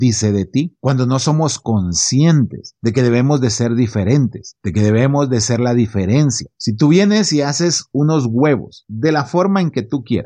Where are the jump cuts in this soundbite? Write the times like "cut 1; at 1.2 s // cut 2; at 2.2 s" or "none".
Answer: cut 1; at 6.5 s